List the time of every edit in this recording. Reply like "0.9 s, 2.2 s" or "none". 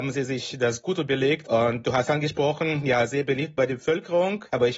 1.4 s